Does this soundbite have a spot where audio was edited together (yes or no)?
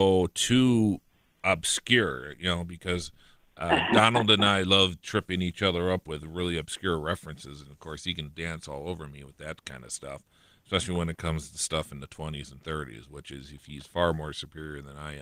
no